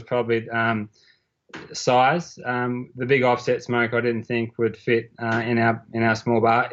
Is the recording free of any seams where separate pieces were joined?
yes; 0 cuts

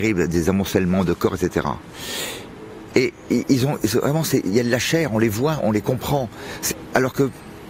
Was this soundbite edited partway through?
yes; 2 cuts; at 2.9 s, 5.6 s

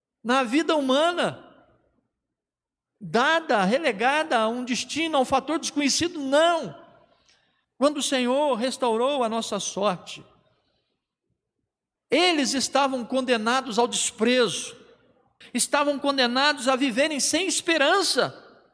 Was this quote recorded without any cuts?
no; 3 cuts; at 7.6 s, 12.0 s, 15.4 s

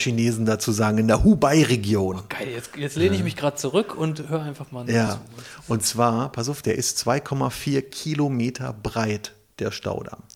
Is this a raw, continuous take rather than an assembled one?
yes; 0 cuts

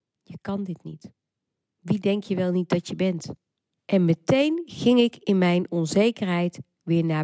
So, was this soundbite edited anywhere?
yes; 1 cut; at 3.8 s

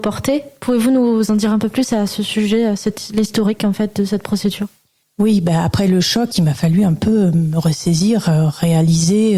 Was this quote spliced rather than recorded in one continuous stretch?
no; 0 cuts

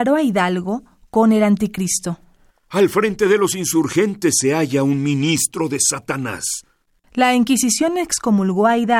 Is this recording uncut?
yes; 0 cuts

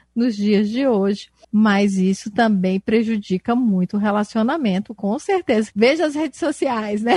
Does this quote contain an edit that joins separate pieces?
yes; 2 cuts; at 1.4 s, 5.7 s

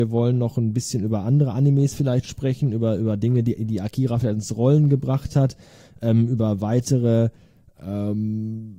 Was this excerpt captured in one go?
yes; 0 cuts

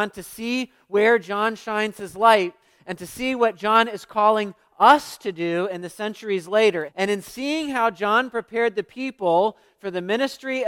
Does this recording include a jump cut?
yes; 1 cut; at 6.9 s

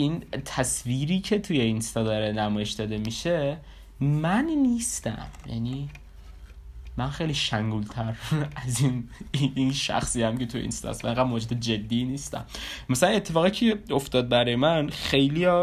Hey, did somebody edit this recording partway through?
no; 0 cuts

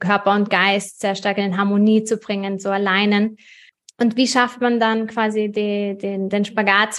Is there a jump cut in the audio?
yes; 1 cut; at 1.4 s

